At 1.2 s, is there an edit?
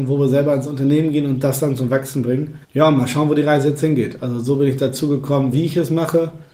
no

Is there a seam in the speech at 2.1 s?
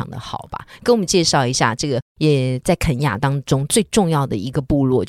no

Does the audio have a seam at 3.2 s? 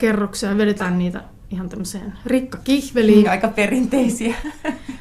yes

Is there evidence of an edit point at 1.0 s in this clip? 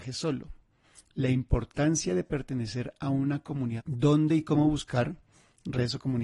no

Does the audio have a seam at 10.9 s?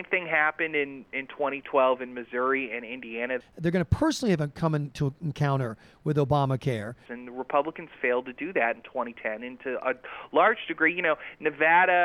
no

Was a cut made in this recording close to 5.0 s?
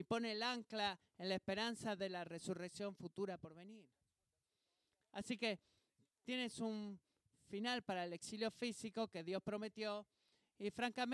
yes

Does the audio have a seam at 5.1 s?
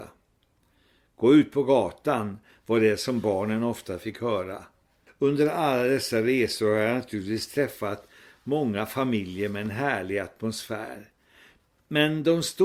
yes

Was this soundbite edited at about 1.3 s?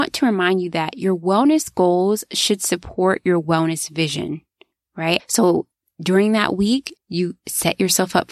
no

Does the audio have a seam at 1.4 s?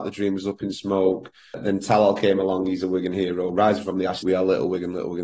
no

